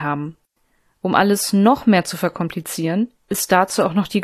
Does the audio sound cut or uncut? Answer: uncut